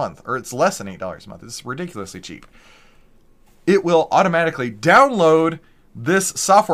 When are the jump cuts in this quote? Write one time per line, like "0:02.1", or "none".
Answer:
none